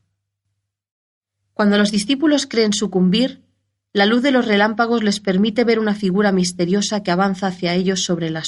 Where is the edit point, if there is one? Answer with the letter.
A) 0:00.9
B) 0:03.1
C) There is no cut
C